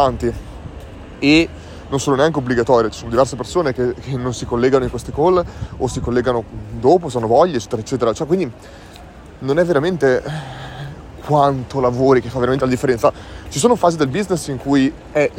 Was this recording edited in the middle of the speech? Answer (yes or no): no